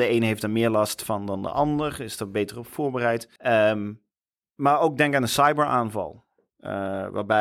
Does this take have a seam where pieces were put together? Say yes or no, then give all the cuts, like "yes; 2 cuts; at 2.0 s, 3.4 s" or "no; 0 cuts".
yes; 1 cut; at 3.4 s